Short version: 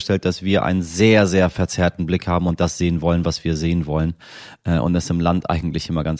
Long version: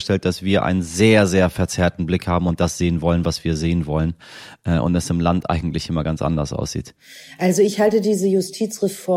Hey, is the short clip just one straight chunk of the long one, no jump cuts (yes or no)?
yes